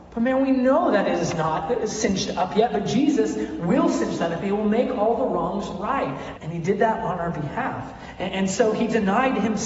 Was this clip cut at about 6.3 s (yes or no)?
yes